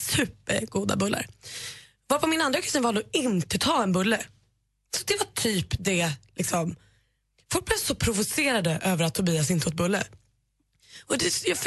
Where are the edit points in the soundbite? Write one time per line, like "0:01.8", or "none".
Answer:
none